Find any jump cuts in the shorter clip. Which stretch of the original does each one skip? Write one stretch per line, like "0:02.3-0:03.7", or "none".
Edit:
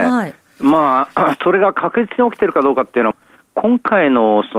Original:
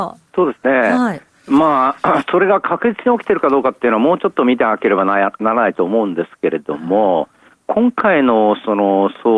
0:04.0-0:07.2